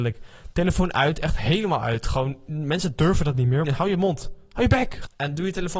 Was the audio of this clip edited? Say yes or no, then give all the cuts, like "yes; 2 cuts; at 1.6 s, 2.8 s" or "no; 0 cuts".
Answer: yes; 1 cut; at 3.6 s